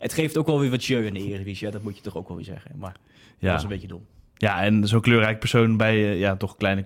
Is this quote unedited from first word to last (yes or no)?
yes